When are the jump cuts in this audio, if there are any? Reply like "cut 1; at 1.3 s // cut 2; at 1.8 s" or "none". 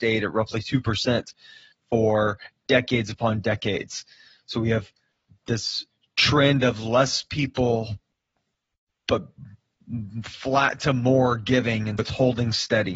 cut 1; at 12.0 s